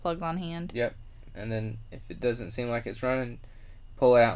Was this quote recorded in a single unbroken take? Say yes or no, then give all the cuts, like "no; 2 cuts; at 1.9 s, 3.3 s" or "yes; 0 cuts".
no; 1 cut; at 1.3 s